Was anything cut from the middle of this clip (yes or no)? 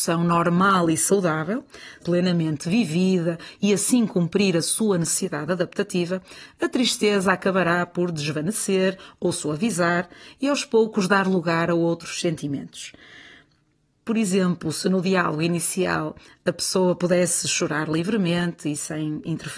yes